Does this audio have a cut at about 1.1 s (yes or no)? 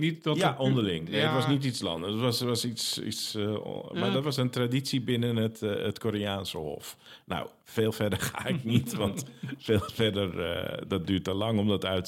no